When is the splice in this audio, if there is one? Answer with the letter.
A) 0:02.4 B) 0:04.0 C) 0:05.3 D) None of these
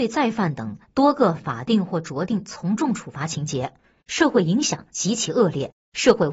B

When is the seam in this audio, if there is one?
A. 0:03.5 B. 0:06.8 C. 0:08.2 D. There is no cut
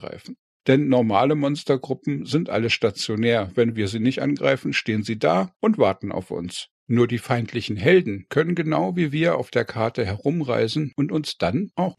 D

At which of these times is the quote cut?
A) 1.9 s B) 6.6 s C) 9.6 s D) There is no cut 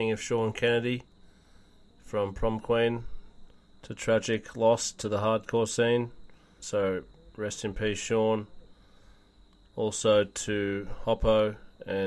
B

